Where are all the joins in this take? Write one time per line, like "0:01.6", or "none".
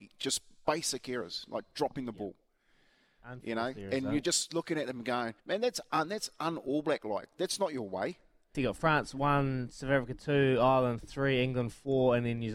0:05.4
0:08.5